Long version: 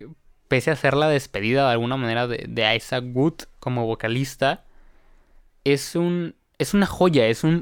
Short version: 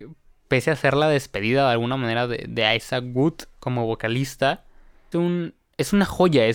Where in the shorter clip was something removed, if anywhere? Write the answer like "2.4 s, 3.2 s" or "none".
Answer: 5.1 s